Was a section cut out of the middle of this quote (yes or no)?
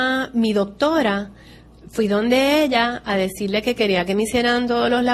no